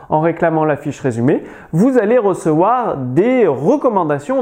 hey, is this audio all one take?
yes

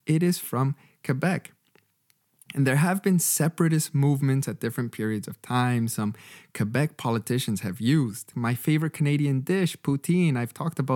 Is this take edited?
yes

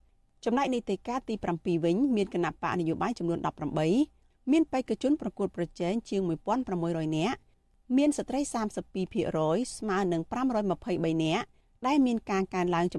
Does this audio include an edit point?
no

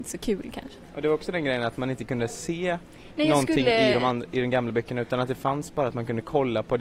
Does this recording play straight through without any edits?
yes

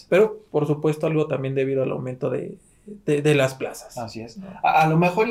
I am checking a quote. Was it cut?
no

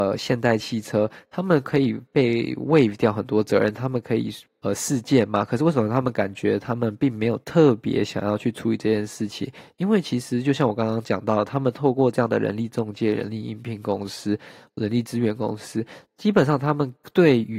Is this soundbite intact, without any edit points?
no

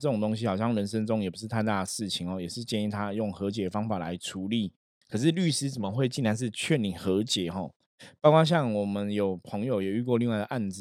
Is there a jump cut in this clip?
yes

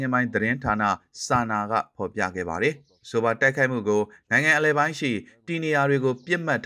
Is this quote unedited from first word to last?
yes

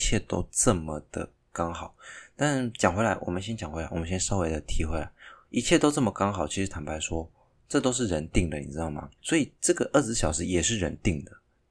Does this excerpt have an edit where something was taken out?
yes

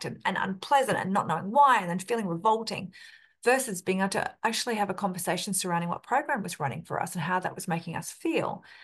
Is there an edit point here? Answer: no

